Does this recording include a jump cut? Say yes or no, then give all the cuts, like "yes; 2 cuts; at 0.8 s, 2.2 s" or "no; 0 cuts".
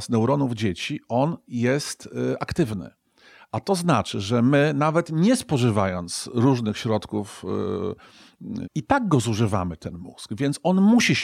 yes; 1 cut; at 8.6 s